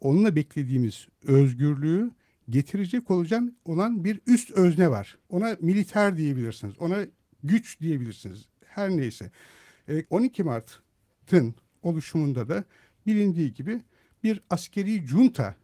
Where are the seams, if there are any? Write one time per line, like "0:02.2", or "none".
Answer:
0:05.2
0:10.0